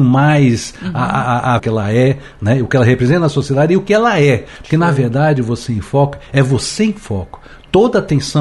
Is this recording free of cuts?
no; 1 cut; at 1.6 s

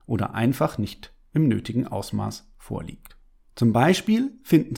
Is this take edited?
yes; 1 cut; at 3.5 s

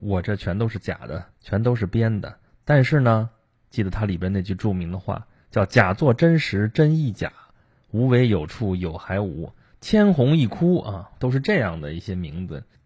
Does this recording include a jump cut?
yes; 3 cuts; at 1.3 s, 9.8 s, 11.1 s

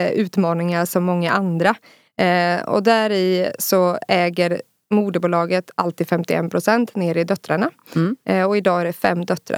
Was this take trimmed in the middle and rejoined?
yes; 1 cut; at 2.1 s

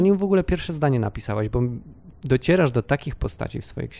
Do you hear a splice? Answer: no; 0 cuts

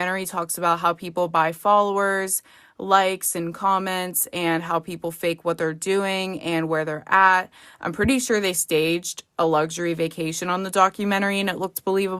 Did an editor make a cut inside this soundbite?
no; 0 cuts

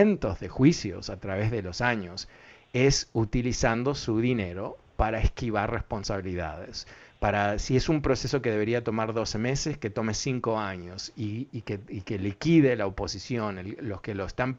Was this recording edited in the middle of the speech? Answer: no; 0 cuts

